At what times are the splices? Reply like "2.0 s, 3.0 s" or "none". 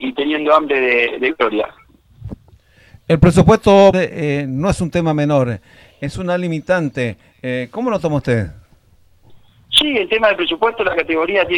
3.9 s